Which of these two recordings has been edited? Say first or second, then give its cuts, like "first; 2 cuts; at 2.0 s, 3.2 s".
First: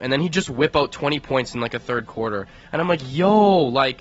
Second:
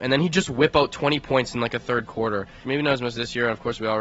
second; 1 cut; at 2.6 s